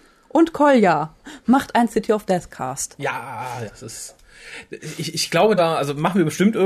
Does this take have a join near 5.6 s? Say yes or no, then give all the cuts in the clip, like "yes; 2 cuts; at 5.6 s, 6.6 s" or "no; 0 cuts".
yes; 2 cuts; at 3.7 s, 5.6 s